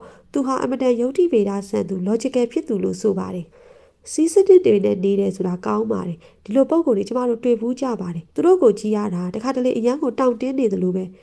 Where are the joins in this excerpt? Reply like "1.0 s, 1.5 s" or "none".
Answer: 3.5 s, 8.3 s